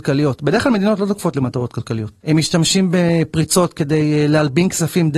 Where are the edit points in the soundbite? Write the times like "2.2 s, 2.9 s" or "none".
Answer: 2.2 s